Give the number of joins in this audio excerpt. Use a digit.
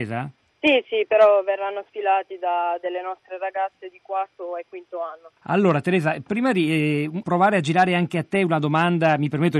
2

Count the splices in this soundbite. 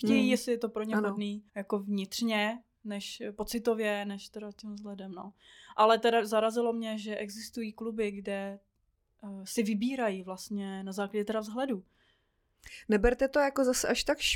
1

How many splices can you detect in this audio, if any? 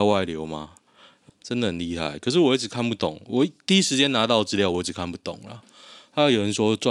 1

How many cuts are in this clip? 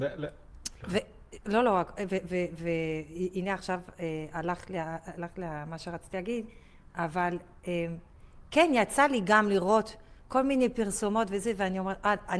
0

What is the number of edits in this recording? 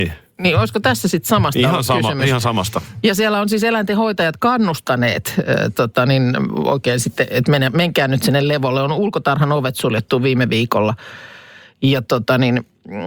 0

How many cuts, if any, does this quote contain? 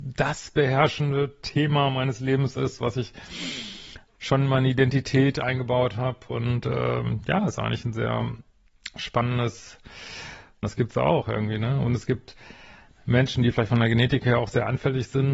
1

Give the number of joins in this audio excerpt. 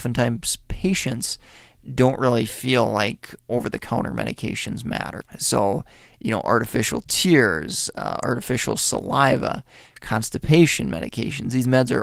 1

